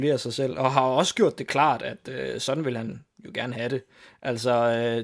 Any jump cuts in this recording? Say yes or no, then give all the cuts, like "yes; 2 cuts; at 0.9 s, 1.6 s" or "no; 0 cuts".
no; 0 cuts